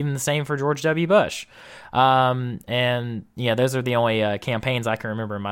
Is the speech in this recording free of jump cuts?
yes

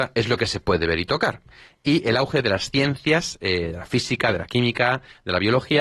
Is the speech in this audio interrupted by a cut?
no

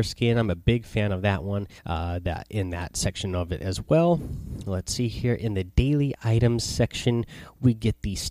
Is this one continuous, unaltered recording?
no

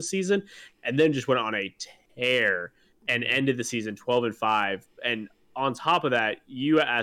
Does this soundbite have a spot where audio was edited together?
no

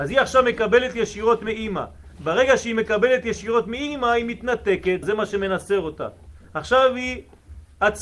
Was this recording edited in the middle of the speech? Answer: yes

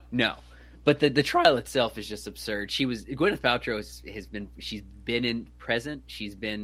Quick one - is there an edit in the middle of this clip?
no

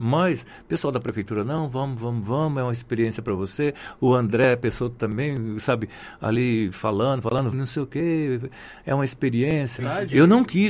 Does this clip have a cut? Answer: yes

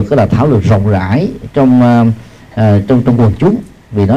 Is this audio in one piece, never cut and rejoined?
yes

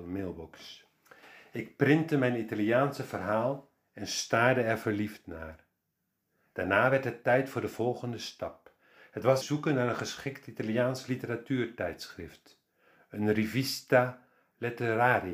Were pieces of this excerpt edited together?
yes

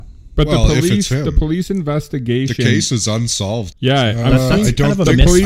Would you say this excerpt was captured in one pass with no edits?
no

